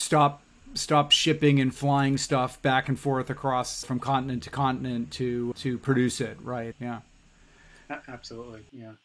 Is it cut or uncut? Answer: cut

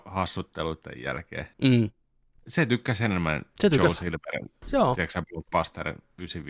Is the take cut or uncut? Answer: cut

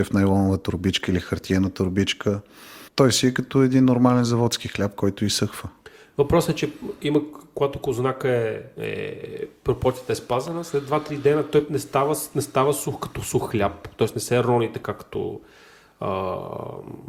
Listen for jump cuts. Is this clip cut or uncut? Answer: uncut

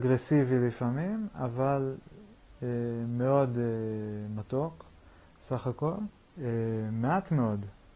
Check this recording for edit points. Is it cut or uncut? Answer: cut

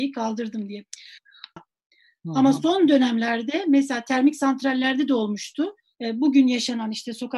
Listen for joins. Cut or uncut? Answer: cut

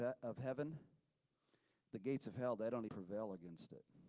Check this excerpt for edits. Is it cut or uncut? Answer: cut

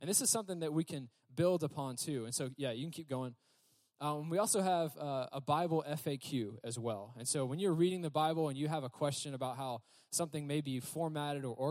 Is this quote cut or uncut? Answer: uncut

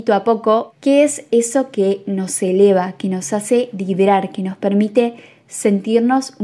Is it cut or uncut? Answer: uncut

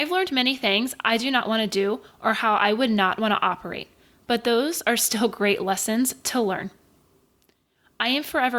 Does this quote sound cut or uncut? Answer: uncut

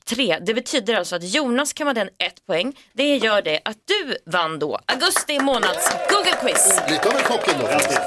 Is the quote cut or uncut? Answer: uncut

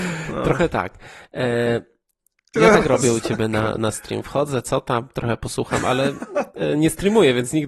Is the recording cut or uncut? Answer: cut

